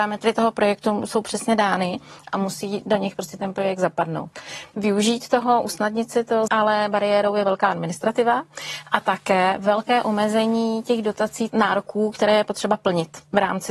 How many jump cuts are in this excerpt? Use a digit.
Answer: 3